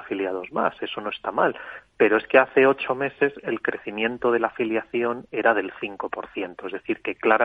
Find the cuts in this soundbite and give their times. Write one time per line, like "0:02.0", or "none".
none